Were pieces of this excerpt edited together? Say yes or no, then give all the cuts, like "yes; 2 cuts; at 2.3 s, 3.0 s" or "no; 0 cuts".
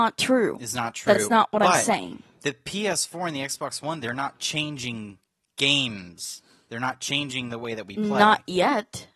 no; 0 cuts